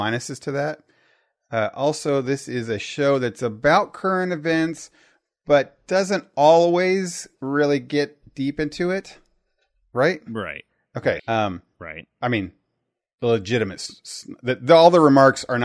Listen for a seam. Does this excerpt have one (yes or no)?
yes